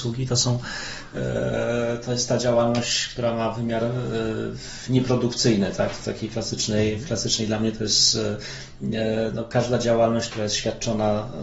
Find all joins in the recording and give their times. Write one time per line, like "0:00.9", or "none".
none

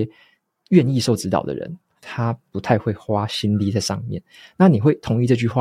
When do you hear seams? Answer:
0:02.0

